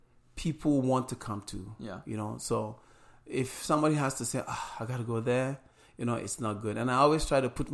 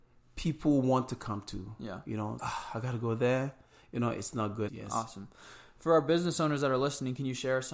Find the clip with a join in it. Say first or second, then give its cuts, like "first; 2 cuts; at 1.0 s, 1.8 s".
second; 2 cuts; at 2.4 s, 4.7 s